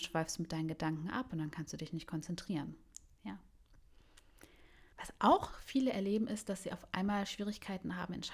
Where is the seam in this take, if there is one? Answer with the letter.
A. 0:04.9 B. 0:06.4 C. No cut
A